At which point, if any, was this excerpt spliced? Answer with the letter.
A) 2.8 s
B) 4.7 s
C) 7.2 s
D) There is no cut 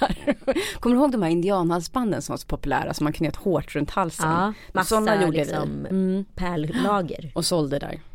B